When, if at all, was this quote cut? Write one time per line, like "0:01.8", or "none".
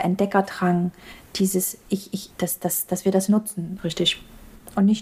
0:02.3
0:03.8